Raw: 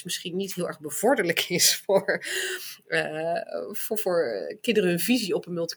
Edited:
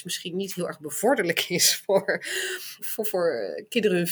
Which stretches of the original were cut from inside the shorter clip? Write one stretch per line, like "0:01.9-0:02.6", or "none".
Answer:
0:02.8-0:03.7